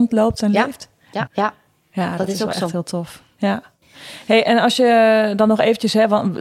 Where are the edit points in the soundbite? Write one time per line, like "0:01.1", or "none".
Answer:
0:01.3